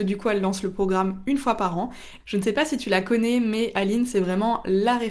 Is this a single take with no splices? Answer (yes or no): no